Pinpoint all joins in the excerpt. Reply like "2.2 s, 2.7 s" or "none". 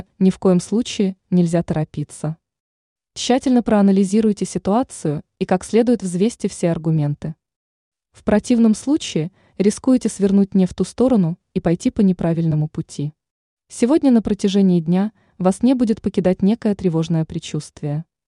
13.6 s